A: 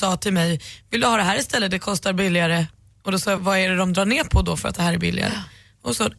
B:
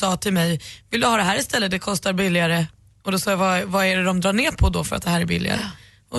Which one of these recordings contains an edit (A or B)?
A